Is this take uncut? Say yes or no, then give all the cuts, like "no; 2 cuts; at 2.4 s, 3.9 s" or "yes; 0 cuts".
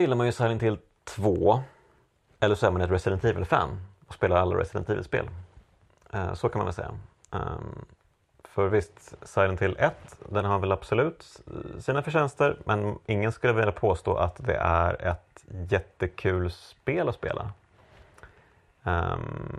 yes; 0 cuts